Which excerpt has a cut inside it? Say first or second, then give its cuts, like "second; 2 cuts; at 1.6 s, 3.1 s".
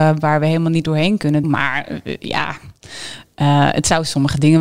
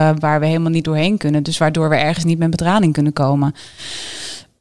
first; 1 cut; at 1.4 s